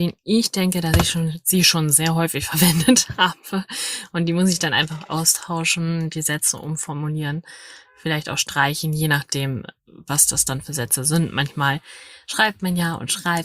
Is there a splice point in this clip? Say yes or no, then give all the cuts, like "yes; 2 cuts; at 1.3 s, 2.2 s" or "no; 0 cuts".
no; 0 cuts